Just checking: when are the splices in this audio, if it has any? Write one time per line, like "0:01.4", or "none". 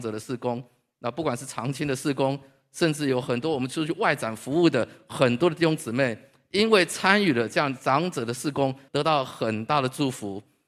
0:02.6
0:08.9